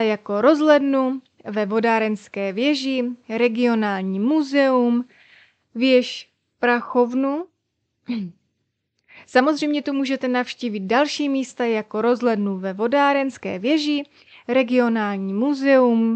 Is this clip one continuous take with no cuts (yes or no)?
yes